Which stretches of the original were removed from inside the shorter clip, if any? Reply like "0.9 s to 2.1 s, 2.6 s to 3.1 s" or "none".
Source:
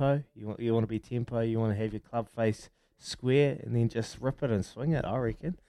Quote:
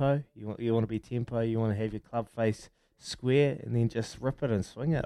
none